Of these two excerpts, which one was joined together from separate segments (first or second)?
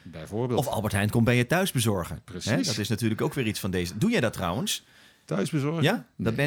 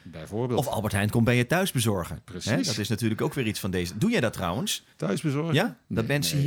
second